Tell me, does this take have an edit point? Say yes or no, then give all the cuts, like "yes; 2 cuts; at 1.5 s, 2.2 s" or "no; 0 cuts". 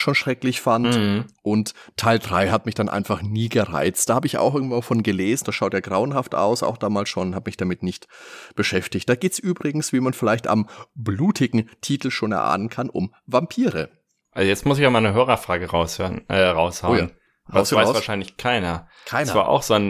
yes; 1 cut; at 5.4 s